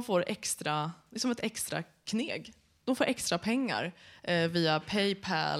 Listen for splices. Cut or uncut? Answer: uncut